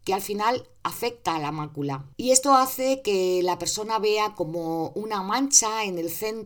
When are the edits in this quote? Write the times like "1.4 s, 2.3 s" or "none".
2.1 s